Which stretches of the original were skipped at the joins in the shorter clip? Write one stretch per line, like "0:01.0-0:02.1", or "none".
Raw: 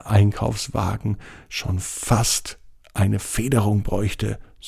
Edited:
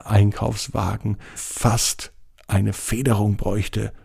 0:01.4-0:01.8